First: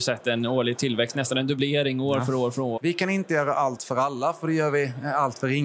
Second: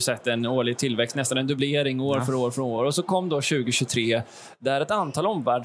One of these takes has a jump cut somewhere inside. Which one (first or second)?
first